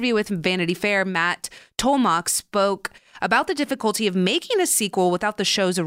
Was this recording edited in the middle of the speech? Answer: no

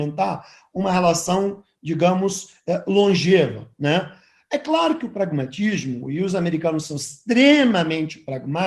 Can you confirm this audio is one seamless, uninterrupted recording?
yes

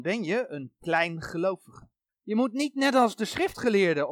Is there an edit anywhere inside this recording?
yes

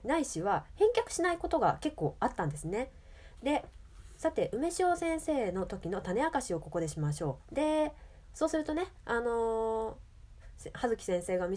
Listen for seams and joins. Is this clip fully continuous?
no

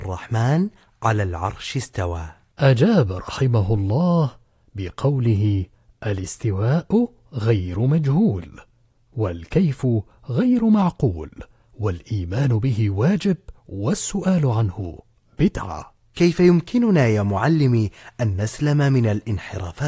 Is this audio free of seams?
yes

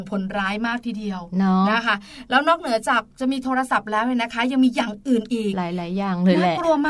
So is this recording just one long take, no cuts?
yes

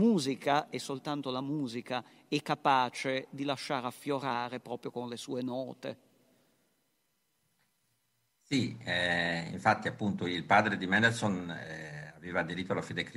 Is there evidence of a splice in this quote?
no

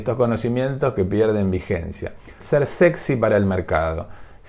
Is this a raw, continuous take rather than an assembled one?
no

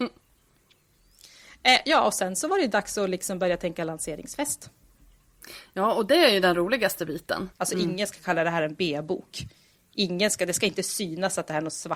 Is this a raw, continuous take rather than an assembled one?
no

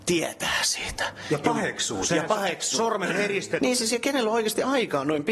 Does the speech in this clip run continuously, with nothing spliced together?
no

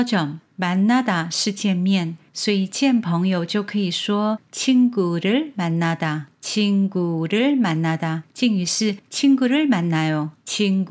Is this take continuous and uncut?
yes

